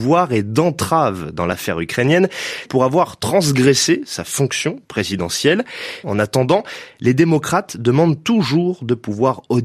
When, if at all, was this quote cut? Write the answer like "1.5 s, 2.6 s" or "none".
2.7 s, 6.0 s